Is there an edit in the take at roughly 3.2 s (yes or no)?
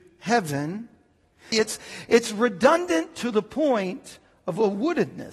no